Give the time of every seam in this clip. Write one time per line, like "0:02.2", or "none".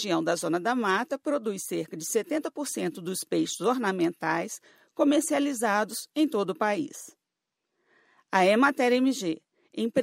none